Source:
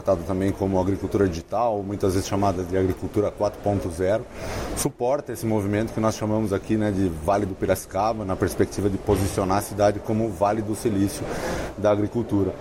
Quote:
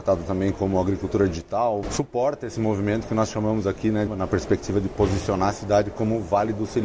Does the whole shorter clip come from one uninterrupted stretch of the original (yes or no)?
no